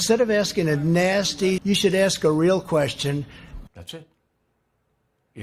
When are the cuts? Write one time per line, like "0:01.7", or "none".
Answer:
0:01.6
0:03.7